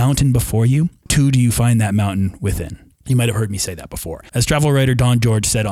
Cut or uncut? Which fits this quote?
cut